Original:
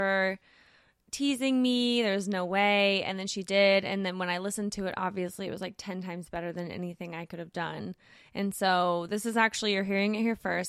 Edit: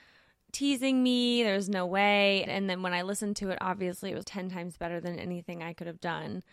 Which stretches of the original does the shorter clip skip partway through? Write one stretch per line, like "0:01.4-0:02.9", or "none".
0:03.0-0:03.8
0:05.6-0:05.8